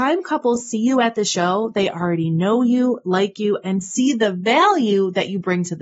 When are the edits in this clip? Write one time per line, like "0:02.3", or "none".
none